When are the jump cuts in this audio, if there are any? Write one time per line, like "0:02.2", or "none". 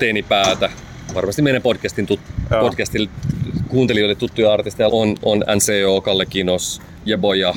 0:04.9